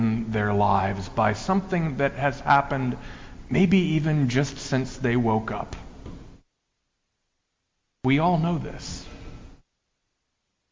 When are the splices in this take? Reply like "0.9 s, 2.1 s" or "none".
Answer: none